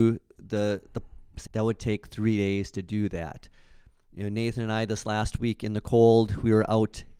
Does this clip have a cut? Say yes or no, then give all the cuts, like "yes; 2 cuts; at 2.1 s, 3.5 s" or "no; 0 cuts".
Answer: yes; 1 cut; at 1.5 s